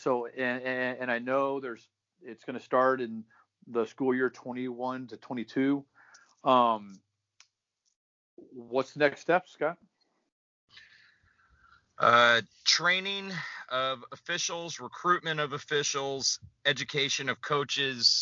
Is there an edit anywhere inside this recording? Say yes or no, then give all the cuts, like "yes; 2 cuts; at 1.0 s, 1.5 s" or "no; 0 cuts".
no; 0 cuts